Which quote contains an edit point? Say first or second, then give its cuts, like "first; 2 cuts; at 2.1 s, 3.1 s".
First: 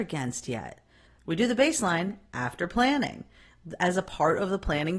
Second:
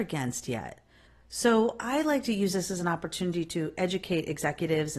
first; 1 cut; at 1.2 s